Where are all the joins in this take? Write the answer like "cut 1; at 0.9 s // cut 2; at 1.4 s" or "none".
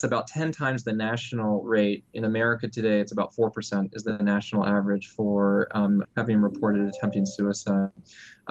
cut 1; at 6.0 s